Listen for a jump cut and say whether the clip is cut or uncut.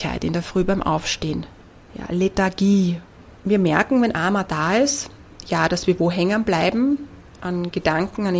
cut